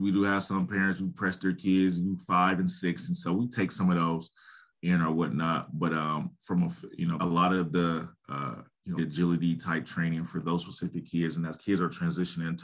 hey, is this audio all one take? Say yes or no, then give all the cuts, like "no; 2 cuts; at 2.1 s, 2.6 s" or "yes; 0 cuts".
no; 2 cuts; at 7.2 s, 9.0 s